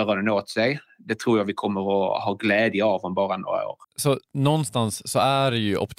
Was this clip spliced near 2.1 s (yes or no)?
no